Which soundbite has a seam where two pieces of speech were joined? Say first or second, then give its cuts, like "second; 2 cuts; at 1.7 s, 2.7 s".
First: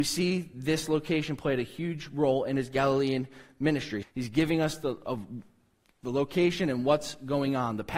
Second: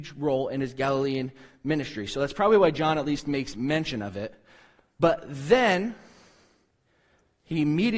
first; 1 cut; at 4.0 s